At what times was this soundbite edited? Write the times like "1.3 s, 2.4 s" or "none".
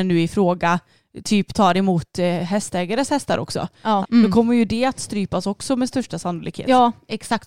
4.0 s